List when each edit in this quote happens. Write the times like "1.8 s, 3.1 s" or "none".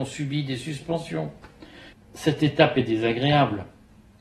1.9 s